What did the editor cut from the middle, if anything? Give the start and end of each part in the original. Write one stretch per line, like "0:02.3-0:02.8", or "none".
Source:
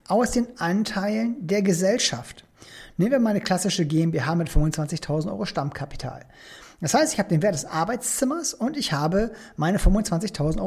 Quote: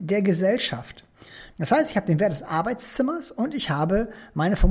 0:02.9-0:06.7